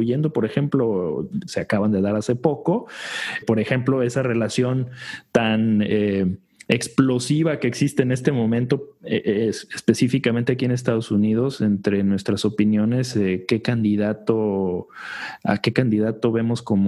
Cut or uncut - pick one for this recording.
cut